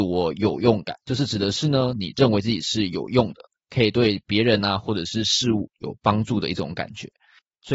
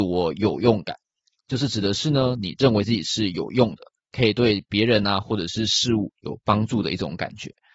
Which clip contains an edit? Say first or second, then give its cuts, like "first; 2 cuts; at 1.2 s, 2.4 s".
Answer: first; 1 cut; at 1.0 s